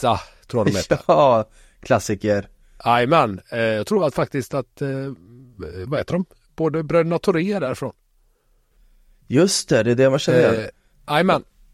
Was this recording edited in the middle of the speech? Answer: no; 0 cuts

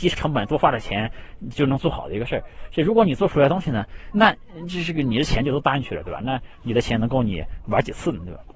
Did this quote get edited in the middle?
yes; 1 cut; at 4.1 s

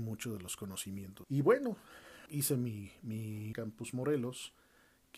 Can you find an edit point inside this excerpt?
yes; 3 cuts; at 1.2 s, 2.3 s, 3.5 s

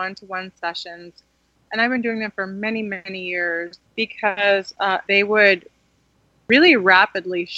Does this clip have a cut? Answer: yes; 2 cuts; at 3.8 s, 5.0 s

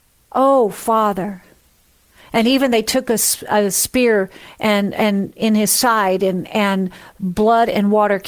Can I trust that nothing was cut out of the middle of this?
yes; 0 cuts

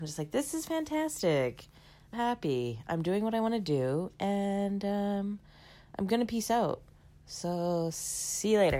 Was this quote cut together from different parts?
yes; 1 cut; at 2.1 s

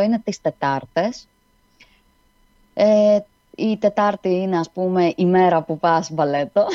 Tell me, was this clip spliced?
no; 0 cuts

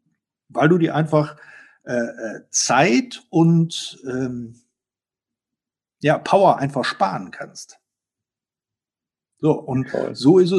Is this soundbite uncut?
yes; 0 cuts

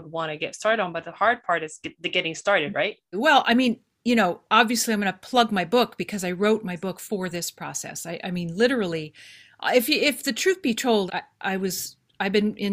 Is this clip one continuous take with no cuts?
no; 2 cuts; at 3.1 s, 11.1 s

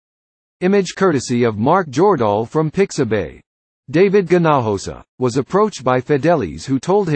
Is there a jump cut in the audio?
yes; 1 cut; at 5.1 s

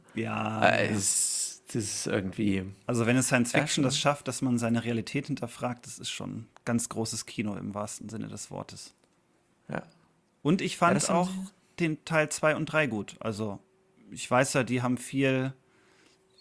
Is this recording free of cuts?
yes; 0 cuts

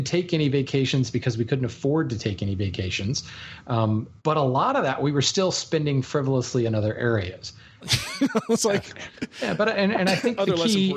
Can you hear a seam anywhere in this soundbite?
yes; 2 cuts; at 4.2 s, 7.8 s

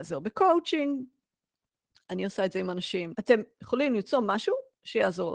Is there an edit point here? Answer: yes; 1 cut; at 3.1 s

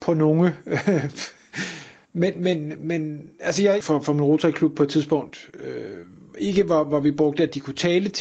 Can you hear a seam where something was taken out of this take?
yes; 1 cut; at 3.8 s

